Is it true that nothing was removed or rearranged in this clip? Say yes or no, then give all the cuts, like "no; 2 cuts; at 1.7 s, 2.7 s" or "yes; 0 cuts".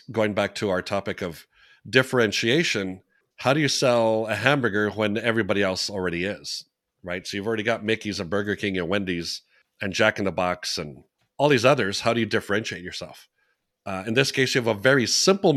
yes; 0 cuts